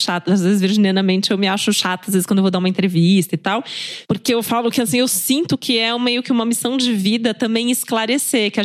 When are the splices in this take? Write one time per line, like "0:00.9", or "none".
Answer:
none